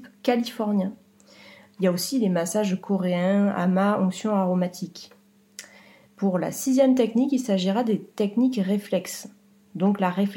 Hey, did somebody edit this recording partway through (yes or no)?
no